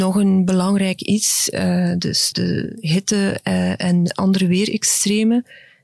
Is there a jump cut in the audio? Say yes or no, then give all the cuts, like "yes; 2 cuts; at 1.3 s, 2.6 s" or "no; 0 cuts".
yes; 1 cut; at 2.3 s